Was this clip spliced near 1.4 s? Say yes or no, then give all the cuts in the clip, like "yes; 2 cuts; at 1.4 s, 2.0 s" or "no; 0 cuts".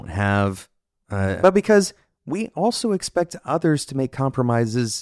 yes; 1 cut; at 1.4 s